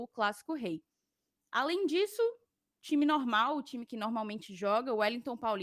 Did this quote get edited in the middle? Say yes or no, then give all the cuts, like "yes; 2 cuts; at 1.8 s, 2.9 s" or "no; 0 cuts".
no; 0 cuts